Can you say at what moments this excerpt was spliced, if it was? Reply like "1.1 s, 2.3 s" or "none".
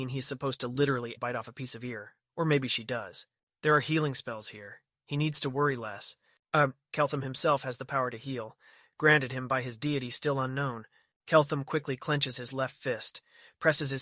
1.2 s